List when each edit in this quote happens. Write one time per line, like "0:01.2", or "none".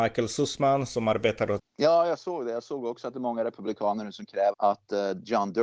0:01.6
0:04.5